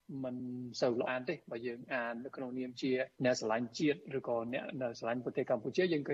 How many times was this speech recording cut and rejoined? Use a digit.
2